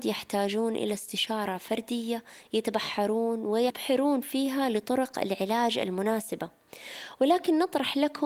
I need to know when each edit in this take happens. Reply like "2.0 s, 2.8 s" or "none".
none